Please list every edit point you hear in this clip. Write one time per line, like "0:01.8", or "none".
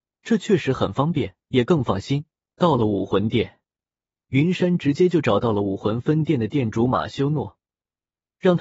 0:02.5